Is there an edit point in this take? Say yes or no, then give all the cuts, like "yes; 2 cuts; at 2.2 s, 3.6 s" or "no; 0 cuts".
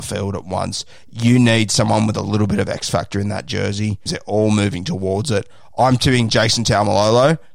yes; 1 cut; at 4.1 s